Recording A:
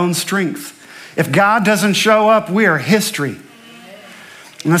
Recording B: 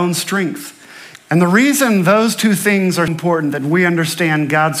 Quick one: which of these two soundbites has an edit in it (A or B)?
B